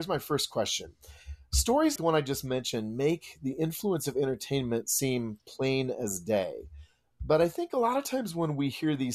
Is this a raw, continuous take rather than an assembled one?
no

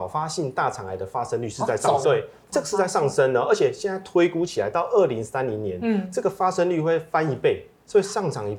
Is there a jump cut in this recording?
yes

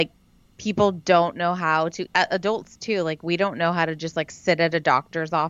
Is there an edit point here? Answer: yes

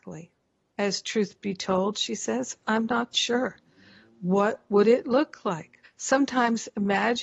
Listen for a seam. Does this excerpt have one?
yes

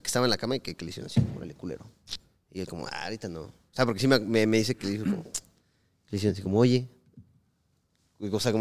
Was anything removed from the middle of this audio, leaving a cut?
no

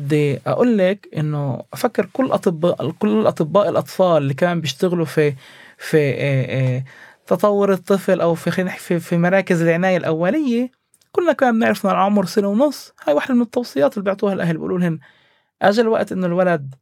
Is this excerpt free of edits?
yes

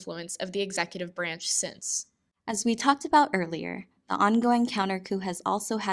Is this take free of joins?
yes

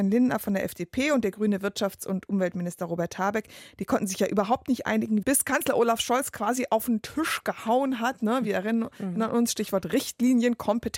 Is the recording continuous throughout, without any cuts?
no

